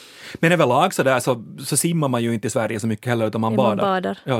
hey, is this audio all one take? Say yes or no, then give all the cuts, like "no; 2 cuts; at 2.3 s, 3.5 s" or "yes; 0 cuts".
yes; 0 cuts